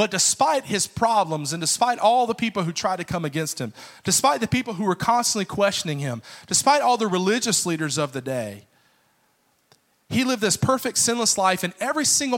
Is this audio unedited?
yes; 0 cuts

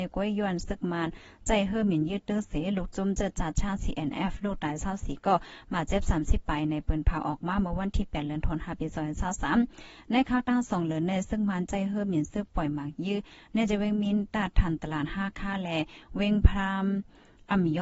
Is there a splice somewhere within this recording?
no; 0 cuts

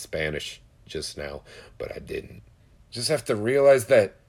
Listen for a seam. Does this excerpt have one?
yes; 1 cut; at 2.8 s

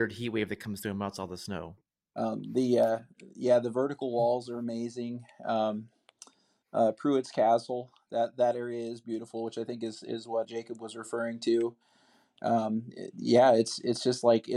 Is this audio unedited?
no; 2 cuts; at 1.8 s, 10.4 s

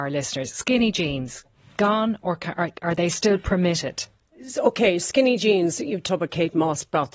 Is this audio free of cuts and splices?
yes; 0 cuts

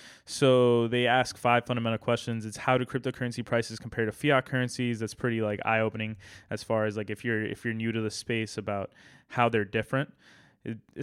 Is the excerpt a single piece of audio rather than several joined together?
yes; 0 cuts

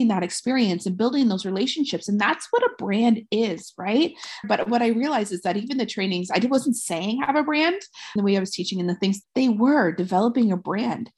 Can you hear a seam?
yes; 3 cuts; at 4.4 s, 8.2 s, 9.2 s

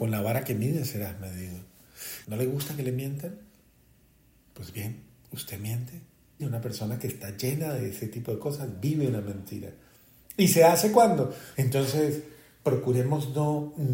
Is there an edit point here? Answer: yes; 3 cuts; at 2.2 s, 6.4 s, 11.5 s

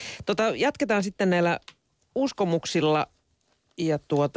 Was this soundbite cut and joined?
no; 0 cuts

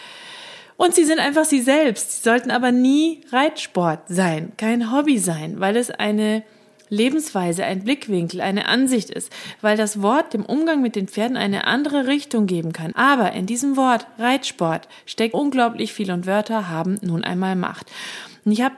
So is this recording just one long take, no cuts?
no; 2 cuts; at 12.9 s, 15.3 s

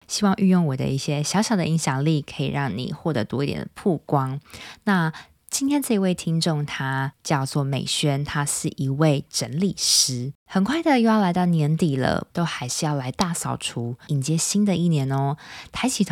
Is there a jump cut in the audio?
yes; 3 cuts; at 10.4 s, 12.3 s, 14.1 s

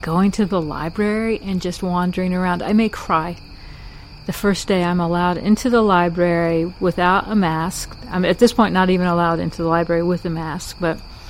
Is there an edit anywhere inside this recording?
no; 0 cuts

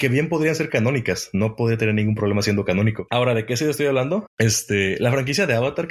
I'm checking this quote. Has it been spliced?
yes; 1 cut; at 4.3 s

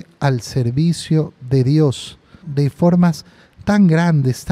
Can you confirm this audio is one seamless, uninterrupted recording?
no; 1 cut; at 2.4 s

